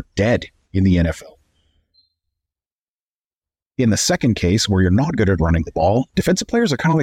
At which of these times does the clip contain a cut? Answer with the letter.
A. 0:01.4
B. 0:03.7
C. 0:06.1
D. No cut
C